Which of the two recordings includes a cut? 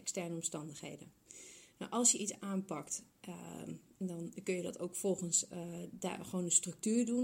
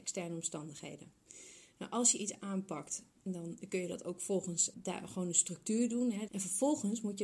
second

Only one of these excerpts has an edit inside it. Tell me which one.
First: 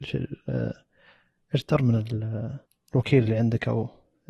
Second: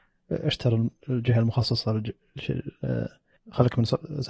second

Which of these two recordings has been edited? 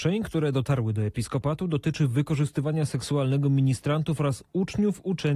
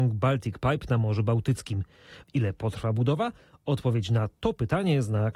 second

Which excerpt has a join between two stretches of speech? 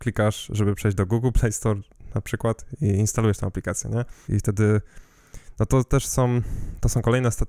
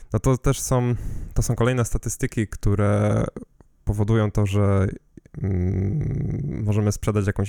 first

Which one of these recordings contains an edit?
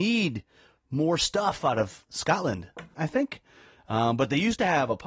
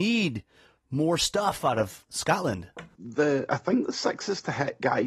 first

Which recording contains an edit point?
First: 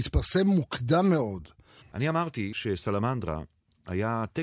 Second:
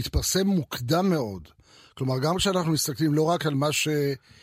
first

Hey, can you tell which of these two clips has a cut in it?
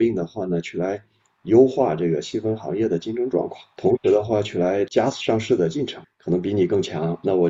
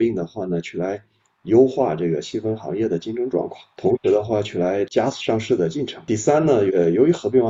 first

